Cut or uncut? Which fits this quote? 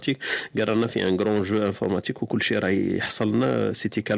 uncut